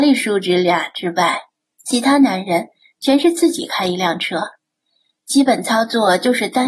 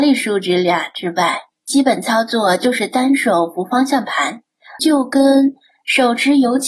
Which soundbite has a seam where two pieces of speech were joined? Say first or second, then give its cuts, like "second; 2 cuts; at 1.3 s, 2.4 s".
second; 2 cuts; at 1.5 s, 4.8 s